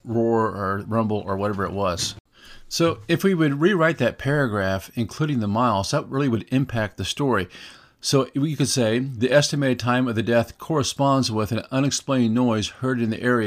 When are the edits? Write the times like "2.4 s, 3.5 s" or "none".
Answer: none

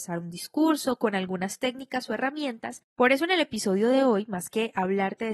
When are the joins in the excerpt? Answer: none

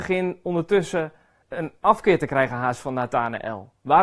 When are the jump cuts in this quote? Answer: 1.4 s

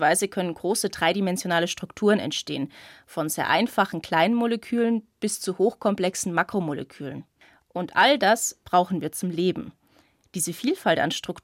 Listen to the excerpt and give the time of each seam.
none

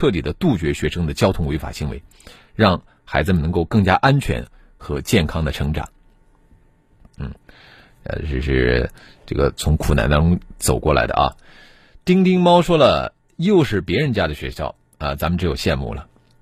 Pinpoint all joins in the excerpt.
7.1 s

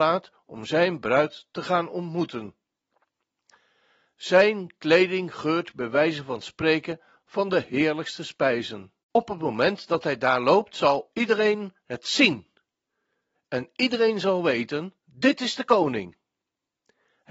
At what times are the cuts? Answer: 13.3 s, 15.0 s

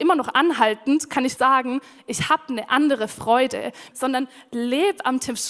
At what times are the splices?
1.4 s, 3.9 s

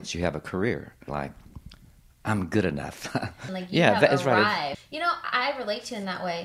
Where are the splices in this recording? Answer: 1.1 s, 3.5 s, 4.7 s

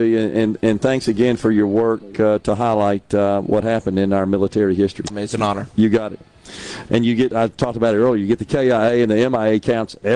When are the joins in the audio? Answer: 5.1 s, 6.9 s

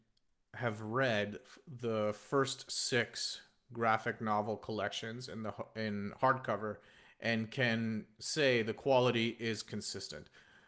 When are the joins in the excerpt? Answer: none

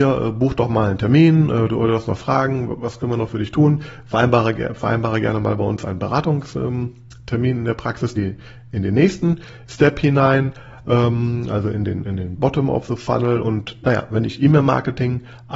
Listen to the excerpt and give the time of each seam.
8.2 s, 12.4 s, 13.4 s

